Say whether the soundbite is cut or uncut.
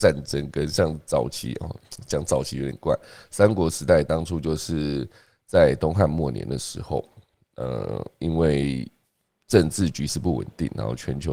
uncut